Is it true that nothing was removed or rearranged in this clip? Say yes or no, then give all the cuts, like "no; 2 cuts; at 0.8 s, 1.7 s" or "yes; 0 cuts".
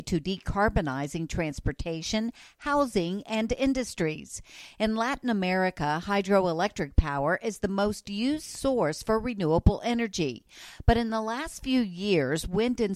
yes; 0 cuts